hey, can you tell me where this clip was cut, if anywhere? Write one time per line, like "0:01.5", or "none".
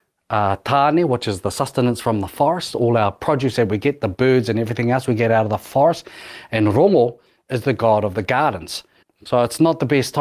0:09.0